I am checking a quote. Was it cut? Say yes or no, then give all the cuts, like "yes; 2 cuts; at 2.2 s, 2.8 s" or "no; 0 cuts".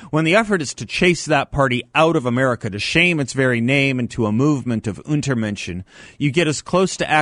no; 0 cuts